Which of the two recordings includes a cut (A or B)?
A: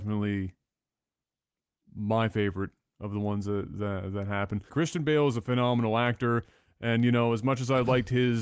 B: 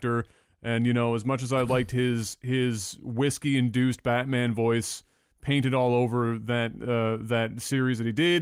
A